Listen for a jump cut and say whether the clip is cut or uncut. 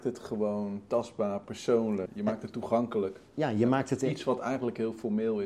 cut